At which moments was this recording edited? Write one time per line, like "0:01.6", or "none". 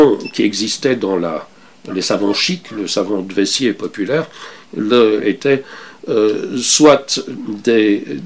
0:05.2

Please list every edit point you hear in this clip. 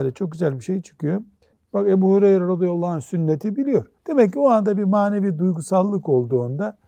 0:01.5
0:04.0

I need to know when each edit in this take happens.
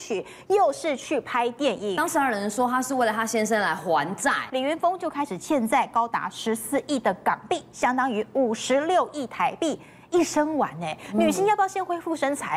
0:04.5

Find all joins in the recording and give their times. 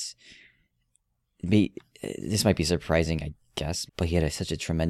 0:03.9

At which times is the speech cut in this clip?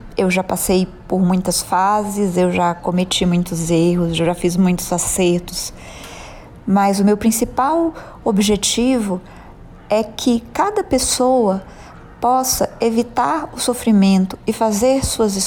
none

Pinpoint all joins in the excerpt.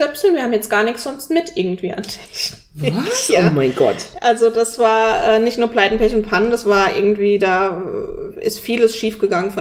none

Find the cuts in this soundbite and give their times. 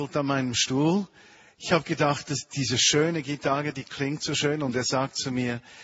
none

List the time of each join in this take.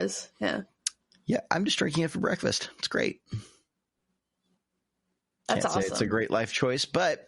none

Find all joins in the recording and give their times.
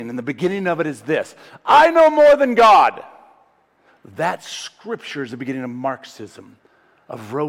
0:03.9

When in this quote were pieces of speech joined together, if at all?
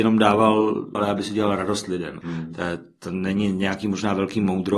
0:00.9
0:02.2

